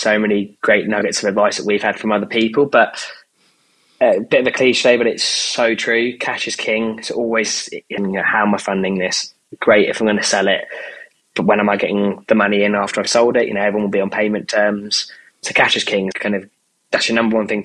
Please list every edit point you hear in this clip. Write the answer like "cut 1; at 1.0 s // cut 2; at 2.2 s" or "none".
cut 1; at 8.0 s // cut 2; at 16.1 s